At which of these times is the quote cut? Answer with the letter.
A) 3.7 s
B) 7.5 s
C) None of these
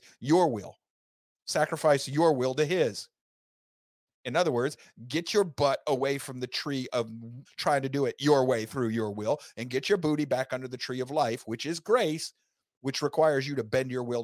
B